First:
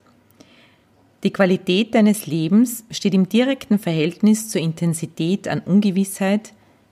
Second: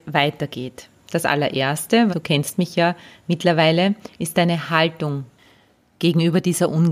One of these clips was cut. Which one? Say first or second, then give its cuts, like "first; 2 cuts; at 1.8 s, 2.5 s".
second; 2 cuts; at 1.0 s, 2.1 s